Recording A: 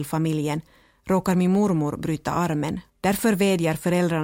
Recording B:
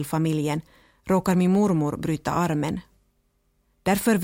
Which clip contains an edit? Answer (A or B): A